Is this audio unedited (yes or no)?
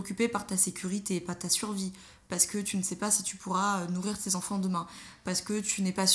yes